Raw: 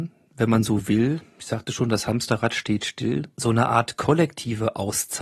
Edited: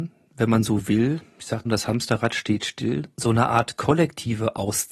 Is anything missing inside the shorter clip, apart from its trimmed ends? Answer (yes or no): yes